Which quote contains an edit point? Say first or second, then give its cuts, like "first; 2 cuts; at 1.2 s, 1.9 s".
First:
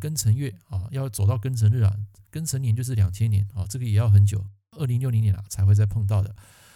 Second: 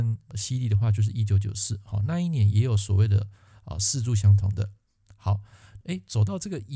second; 1 cut; at 5.8 s